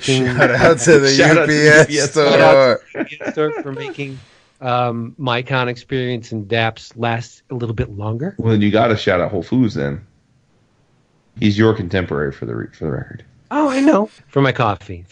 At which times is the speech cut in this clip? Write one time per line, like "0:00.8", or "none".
0:11.4
0:14.2